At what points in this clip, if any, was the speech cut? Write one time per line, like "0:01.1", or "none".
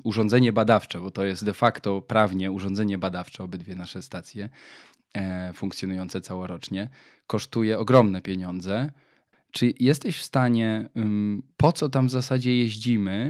0:09.3
0:11.5